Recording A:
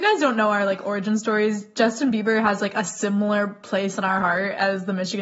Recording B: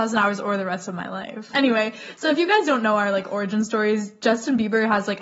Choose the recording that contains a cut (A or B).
B